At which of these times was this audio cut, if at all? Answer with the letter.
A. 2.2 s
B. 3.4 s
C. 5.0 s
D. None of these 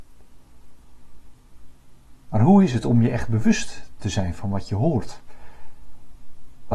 D